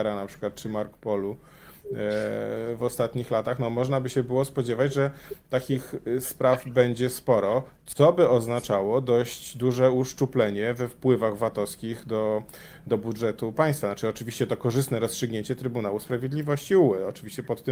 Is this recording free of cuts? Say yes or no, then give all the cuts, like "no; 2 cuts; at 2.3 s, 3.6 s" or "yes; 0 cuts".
yes; 0 cuts